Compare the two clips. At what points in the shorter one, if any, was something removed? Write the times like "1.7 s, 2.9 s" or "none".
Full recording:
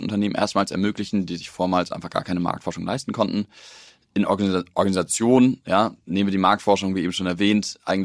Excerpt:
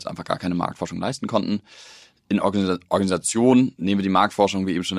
3.8 s